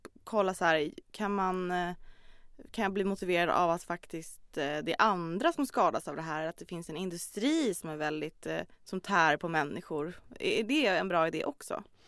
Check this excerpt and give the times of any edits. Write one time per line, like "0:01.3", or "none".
0:08.7